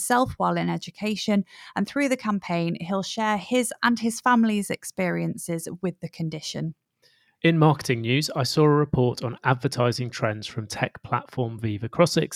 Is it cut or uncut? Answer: uncut